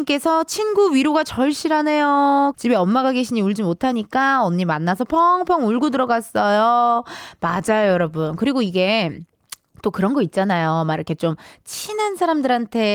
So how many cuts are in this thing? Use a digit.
1